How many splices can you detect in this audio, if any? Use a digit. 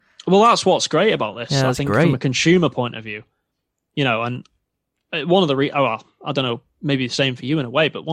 0